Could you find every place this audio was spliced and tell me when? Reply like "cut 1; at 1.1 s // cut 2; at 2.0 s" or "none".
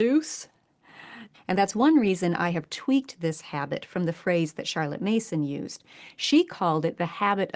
cut 1; at 1.3 s